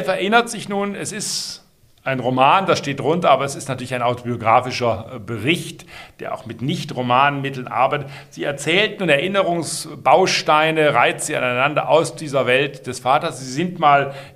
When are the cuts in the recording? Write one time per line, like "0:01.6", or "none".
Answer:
none